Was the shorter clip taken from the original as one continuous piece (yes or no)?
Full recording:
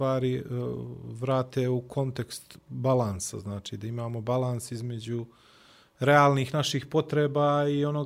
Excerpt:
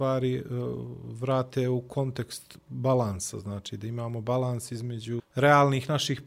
no